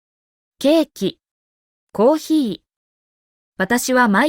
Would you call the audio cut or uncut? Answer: cut